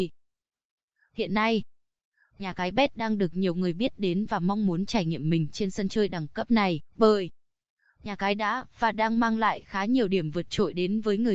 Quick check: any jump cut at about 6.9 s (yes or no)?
yes